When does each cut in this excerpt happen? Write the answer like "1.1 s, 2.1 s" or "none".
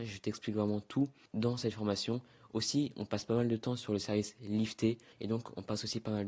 5.1 s